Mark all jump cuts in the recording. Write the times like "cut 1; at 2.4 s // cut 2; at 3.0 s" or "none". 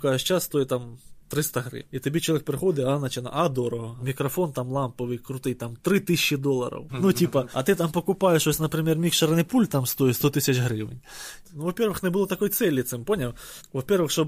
cut 1; at 4.0 s // cut 2; at 6.9 s // cut 3; at 11.4 s